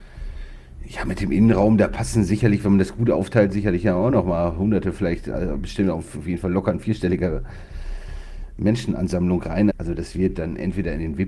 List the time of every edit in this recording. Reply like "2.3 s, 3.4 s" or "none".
9.7 s